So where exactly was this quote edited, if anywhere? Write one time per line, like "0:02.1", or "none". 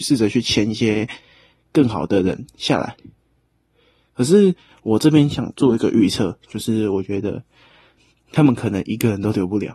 none